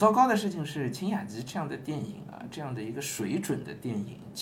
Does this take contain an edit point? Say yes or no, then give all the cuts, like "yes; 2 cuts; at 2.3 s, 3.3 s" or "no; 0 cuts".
no; 0 cuts